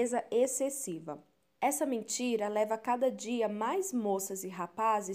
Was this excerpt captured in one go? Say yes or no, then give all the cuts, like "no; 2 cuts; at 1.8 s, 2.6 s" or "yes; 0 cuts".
no; 1 cut; at 1.6 s